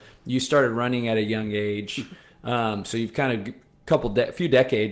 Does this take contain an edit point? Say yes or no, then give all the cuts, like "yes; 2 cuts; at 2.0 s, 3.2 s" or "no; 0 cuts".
no; 0 cuts